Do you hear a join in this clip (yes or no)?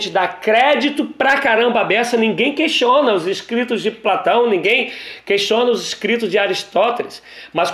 no